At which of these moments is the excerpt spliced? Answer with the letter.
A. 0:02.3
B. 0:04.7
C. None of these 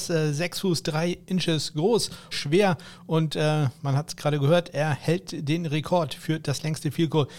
A